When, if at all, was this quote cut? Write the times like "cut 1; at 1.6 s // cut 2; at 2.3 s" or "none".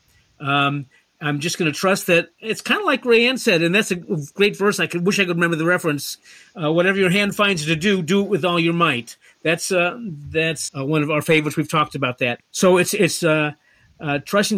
cut 1; at 10.7 s // cut 2; at 12.4 s